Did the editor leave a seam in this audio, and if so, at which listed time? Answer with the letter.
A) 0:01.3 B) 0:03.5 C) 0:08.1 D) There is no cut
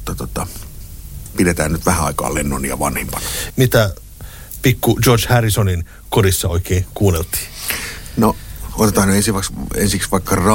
B